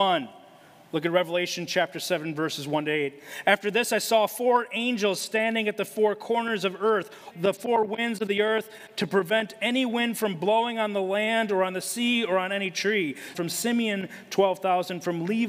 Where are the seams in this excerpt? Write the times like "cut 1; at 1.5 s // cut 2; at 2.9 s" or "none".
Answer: cut 1; at 7.3 s // cut 2; at 13.3 s